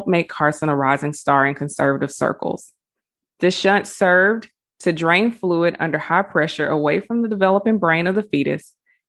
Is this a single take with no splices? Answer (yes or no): no